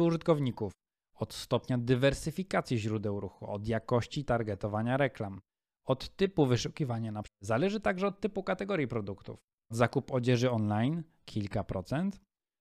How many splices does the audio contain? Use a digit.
2